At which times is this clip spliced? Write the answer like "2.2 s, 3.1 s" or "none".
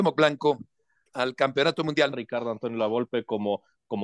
2.1 s